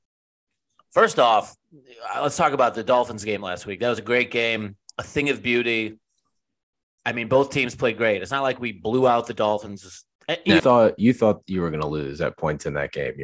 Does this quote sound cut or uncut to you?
cut